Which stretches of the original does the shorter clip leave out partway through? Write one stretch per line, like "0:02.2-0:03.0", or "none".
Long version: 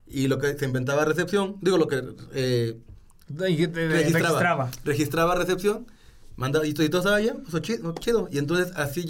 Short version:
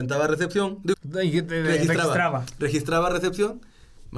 0:01.7-0:03.2